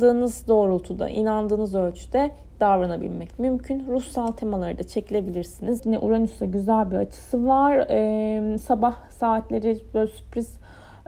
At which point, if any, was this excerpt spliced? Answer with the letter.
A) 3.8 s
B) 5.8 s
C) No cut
B